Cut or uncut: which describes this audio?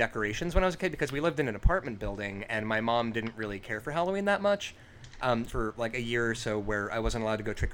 cut